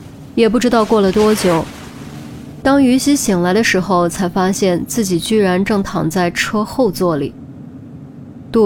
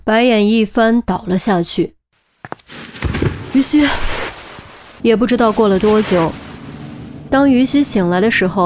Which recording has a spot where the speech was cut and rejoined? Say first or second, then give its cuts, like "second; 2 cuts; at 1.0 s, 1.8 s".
second; 1 cut; at 5.0 s